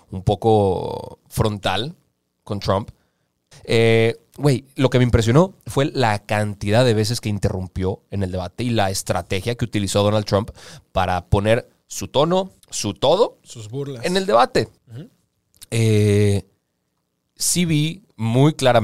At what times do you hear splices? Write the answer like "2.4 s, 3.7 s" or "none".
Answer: 3.5 s, 12.6 s, 14.8 s